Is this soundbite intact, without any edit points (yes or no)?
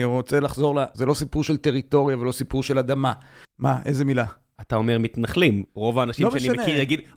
no